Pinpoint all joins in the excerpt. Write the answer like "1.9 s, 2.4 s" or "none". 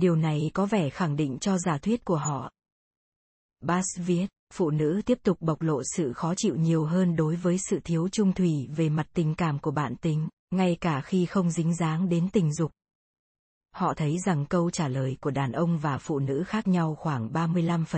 13.5 s